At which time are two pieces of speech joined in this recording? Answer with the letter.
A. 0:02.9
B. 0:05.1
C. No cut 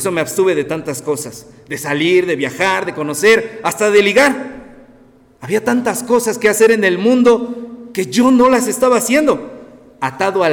A